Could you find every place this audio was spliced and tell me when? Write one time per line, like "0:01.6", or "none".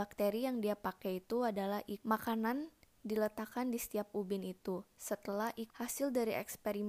0:02.0
0:05.7